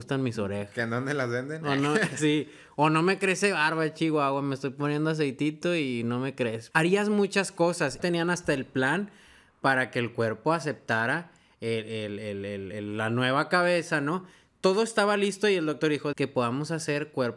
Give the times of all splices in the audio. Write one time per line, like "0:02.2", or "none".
0:06.7
0:08.0
0:16.1